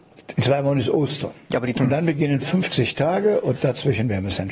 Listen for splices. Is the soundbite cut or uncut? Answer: cut